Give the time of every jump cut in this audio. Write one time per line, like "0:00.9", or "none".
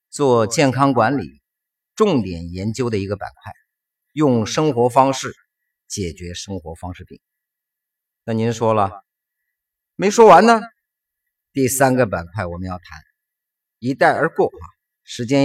none